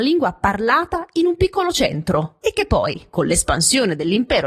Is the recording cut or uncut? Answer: cut